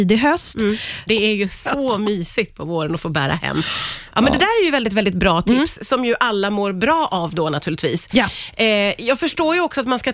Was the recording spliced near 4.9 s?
no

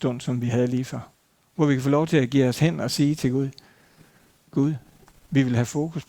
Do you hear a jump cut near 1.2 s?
no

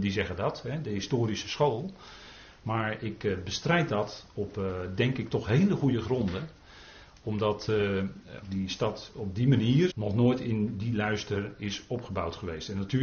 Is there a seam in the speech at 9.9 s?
yes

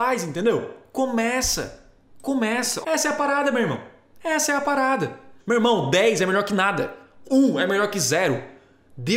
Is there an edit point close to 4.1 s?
no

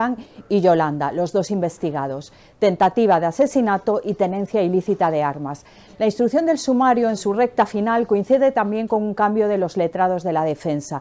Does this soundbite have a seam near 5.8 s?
no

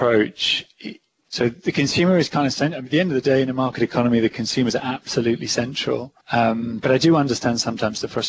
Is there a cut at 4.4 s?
no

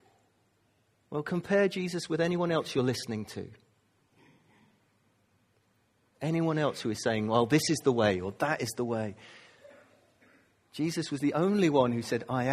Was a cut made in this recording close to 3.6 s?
no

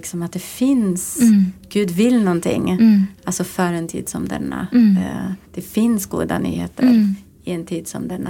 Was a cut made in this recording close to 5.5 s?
yes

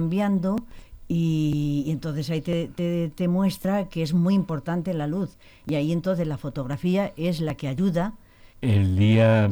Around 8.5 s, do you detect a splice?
yes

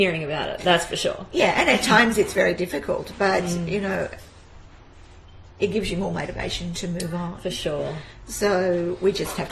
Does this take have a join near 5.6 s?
yes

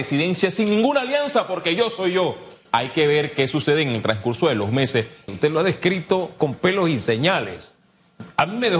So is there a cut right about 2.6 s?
yes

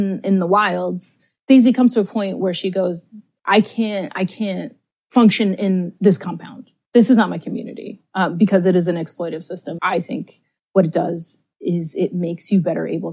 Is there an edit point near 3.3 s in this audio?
no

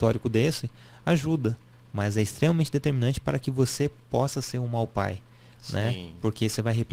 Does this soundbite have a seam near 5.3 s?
no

